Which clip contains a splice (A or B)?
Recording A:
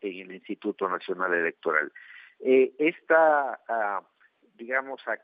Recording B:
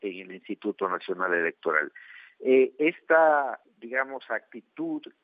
B